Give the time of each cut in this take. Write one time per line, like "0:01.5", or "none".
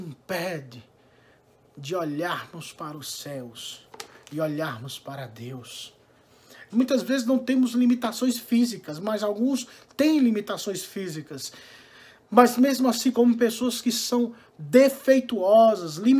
0:06.7
0:13.1